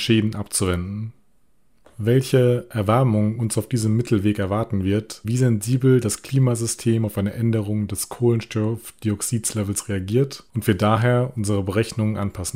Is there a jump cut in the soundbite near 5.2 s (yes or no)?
yes